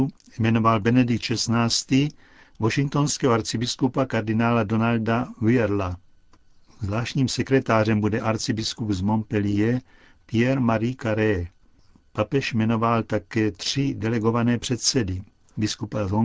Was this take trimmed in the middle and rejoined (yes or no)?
no